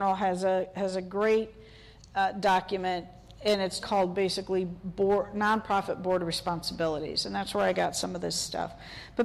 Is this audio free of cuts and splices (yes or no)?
no